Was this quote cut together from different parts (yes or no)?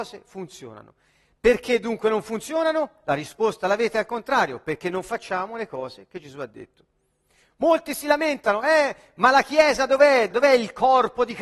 yes